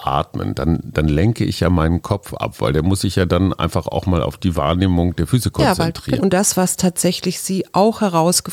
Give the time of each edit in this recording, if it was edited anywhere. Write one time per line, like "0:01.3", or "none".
0:06.2